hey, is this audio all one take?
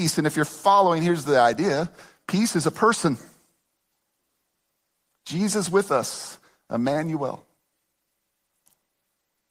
yes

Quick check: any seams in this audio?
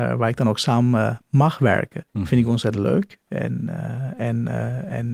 yes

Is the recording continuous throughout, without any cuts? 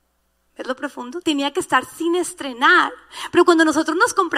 no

